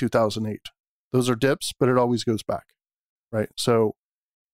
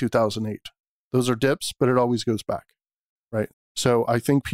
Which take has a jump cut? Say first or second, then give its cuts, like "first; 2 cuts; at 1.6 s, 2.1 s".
second; 1 cut; at 3.5 s